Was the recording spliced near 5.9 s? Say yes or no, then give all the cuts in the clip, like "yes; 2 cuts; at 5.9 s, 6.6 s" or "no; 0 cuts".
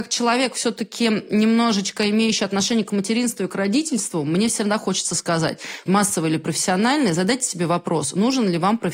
yes; 1 cut; at 5.9 s